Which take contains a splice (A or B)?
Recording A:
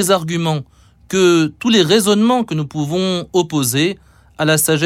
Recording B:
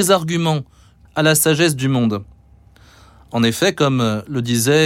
B